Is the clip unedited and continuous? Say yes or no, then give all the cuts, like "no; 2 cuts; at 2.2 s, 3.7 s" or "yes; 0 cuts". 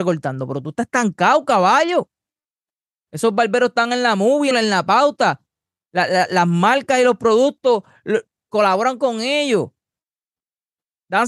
no; 1 cut; at 4.5 s